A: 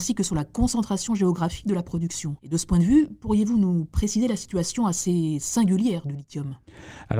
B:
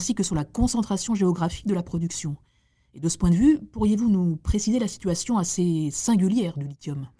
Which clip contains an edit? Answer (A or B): A